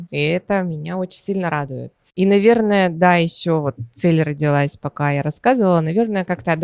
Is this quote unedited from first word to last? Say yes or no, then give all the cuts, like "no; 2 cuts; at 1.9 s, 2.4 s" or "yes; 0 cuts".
yes; 0 cuts